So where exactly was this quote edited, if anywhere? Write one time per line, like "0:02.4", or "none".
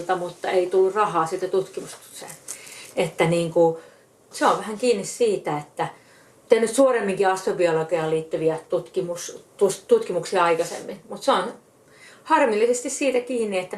0:02.9